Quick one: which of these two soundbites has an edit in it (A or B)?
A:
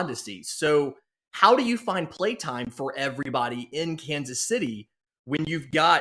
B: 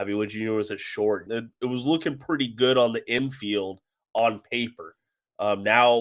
B